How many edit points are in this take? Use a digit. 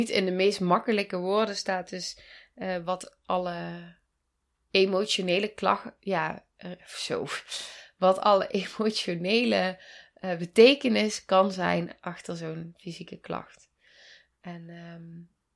0